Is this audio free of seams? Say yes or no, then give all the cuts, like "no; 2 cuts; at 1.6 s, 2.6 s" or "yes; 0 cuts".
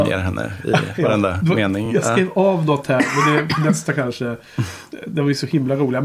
yes; 0 cuts